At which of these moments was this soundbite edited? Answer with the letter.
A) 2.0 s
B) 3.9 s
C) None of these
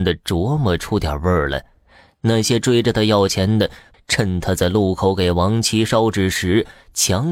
B